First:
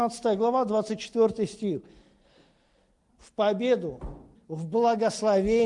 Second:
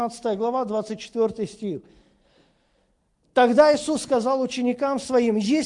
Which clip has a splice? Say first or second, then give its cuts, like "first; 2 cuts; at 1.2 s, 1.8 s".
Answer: first; 2 cuts; at 3.1 s, 4.4 s